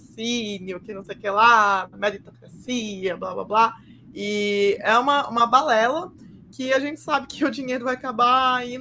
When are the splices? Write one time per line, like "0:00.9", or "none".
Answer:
none

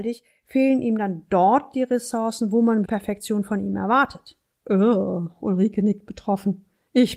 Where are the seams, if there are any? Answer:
0:02.9
0:04.5

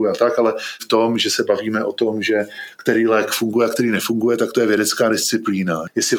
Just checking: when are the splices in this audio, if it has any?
none

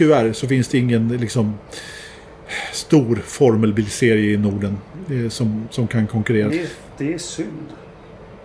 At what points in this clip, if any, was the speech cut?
0:06.5

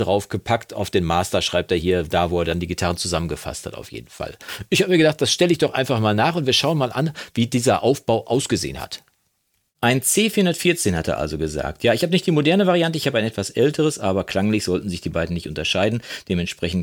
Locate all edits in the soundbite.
none

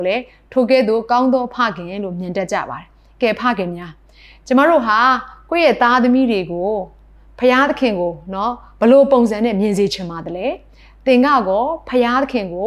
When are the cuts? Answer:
none

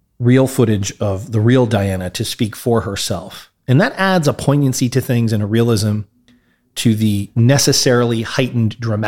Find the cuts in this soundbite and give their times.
none

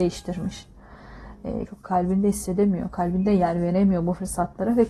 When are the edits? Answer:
0:01.7

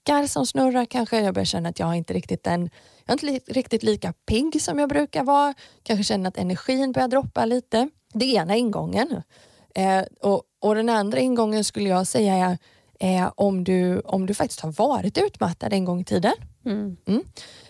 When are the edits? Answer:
none

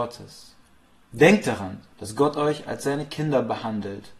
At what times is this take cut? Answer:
0:01.9

